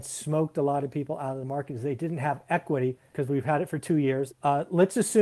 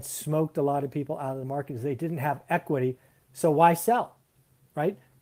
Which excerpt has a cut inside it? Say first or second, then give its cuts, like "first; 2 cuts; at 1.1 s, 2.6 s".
first; 2 cuts; at 3.1 s, 4.3 s